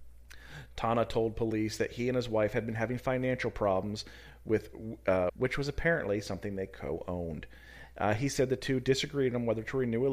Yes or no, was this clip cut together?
yes